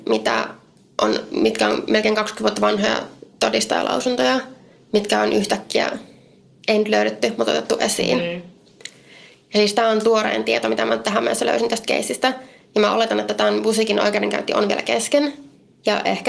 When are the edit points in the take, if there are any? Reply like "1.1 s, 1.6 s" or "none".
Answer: none